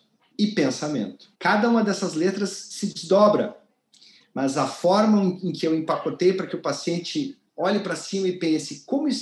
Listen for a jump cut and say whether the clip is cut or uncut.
cut